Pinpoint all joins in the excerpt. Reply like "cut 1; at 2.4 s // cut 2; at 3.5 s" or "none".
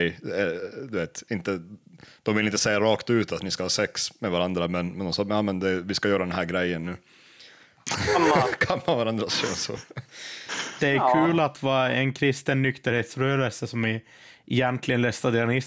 none